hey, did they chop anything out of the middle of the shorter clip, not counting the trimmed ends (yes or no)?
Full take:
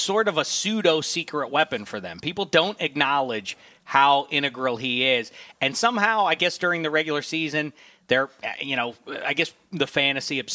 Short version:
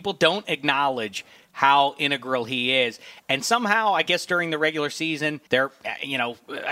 yes